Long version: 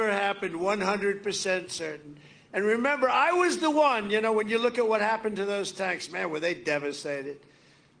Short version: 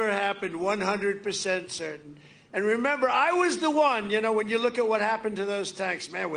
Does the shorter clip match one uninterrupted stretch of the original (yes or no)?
yes